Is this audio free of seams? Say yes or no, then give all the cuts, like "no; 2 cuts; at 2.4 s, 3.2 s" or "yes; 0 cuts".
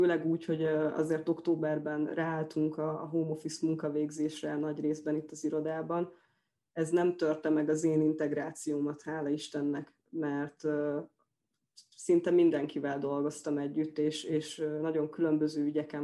yes; 0 cuts